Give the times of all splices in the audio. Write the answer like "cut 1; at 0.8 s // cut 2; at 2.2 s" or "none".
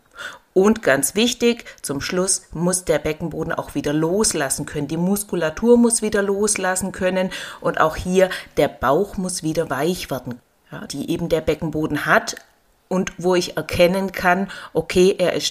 cut 1; at 10.9 s